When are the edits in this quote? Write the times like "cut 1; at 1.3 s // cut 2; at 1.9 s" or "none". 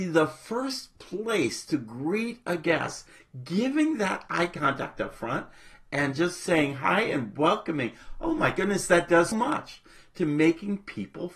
cut 1; at 9.3 s